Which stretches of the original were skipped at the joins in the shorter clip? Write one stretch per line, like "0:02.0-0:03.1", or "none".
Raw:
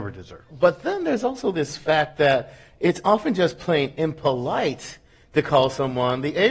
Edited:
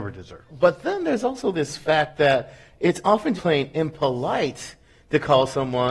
0:03.4-0:03.6